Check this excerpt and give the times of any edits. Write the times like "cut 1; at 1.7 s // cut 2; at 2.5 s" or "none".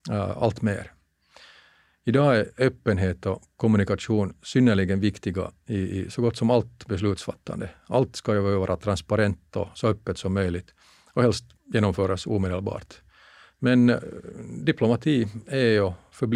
none

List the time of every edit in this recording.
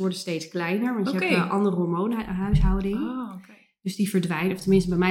none

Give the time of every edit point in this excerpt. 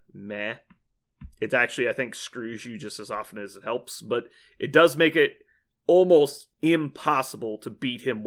cut 1; at 6.5 s

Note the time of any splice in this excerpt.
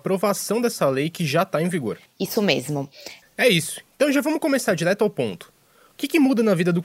cut 1; at 2.1 s // cut 2; at 3.2 s

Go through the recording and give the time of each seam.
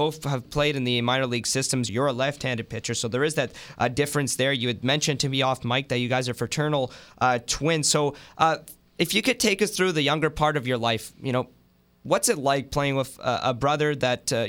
cut 1; at 1.9 s

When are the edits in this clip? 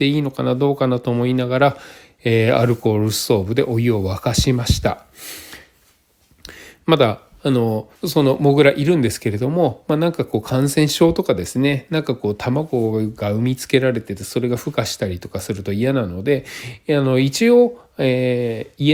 cut 1; at 5.8 s // cut 2; at 8.0 s

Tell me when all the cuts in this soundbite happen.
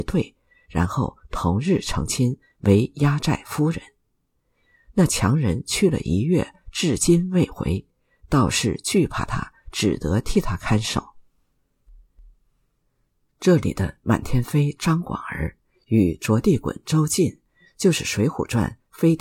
none

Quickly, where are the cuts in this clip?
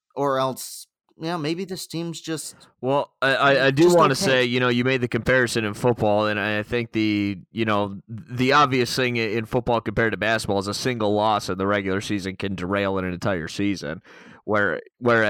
none

